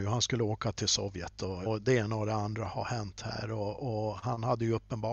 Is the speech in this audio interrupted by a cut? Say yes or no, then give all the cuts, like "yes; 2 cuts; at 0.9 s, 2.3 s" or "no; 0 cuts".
yes; 1 cut; at 1.7 s